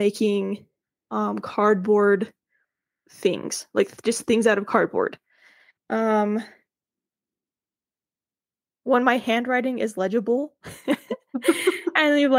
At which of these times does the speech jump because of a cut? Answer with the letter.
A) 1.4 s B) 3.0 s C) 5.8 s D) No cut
C